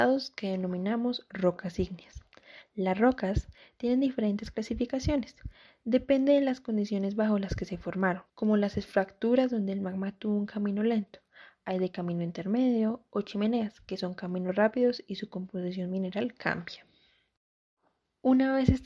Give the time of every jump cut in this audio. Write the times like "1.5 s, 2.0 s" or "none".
8.3 s